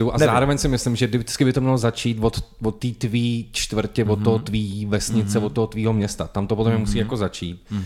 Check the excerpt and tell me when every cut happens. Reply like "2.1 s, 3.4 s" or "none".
4.1 s